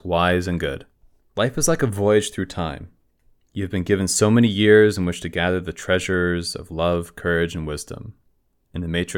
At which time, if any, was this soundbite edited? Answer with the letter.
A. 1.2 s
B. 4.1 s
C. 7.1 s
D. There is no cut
A